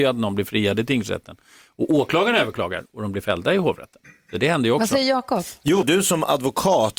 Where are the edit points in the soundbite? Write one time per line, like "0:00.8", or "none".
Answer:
0:05.8